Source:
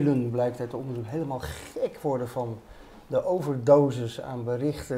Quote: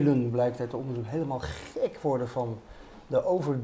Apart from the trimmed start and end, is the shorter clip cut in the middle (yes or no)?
no